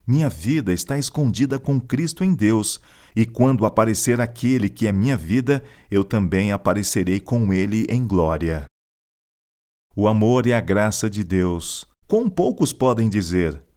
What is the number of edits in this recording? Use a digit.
1